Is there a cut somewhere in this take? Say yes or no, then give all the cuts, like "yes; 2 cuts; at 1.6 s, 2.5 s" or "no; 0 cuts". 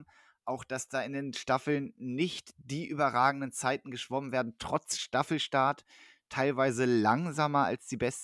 no; 0 cuts